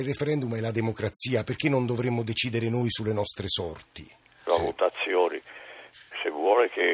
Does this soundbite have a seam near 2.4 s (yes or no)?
no